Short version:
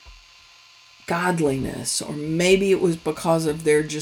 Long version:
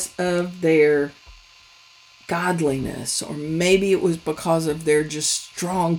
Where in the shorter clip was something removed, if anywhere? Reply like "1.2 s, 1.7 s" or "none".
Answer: none